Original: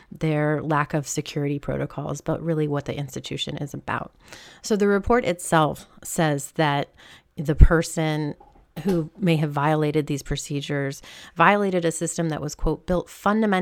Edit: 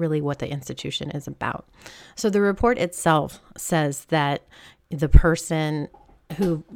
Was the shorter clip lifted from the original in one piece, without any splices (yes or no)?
yes